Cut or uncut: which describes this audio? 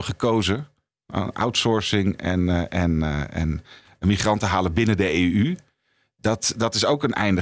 uncut